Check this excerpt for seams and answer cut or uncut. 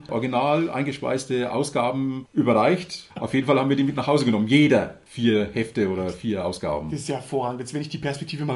cut